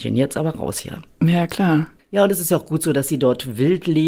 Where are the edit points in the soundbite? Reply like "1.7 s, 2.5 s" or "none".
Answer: 2.0 s